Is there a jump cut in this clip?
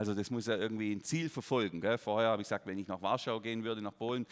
no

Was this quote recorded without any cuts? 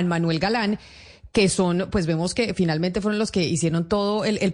yes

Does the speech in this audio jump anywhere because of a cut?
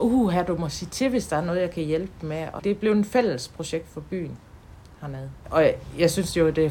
yes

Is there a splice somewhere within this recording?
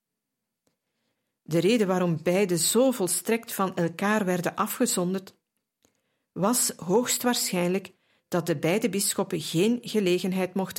no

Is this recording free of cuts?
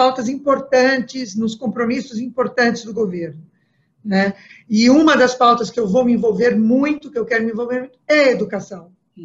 yes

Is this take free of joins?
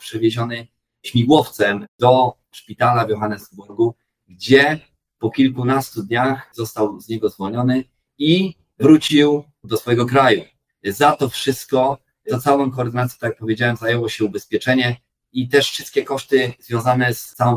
yes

